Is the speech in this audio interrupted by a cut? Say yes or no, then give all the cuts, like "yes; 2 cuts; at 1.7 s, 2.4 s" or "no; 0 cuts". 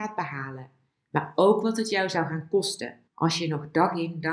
yes; 1 cut; at 3.1 s